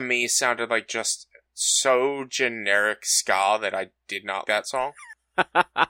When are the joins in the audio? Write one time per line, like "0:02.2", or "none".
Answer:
0:04.4